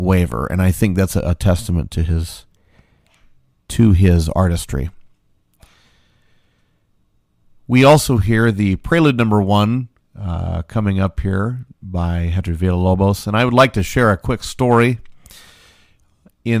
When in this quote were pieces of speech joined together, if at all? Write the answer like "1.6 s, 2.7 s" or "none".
none